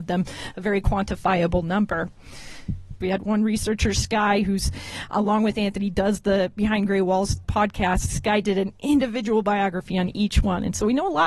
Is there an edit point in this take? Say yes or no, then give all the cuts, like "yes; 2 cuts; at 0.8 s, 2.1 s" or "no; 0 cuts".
yes; 2 cuts; at 3.0 s, 7.4 s